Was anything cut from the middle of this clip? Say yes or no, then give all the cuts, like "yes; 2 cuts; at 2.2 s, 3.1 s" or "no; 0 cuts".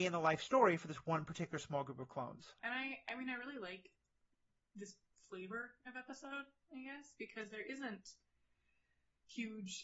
yes; 1 cut; at 2.6 s